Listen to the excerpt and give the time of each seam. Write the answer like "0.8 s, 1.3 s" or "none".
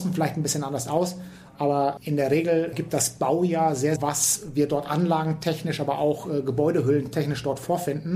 4.0 s

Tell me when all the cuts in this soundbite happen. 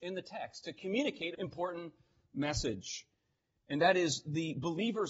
1.3 s

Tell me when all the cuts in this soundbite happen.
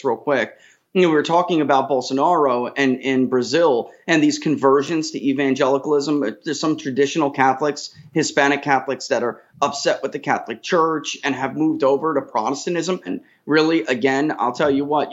13.1 s

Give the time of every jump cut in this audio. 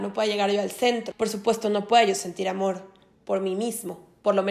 1.1 s

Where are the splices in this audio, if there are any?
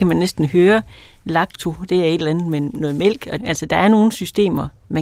3.4 s

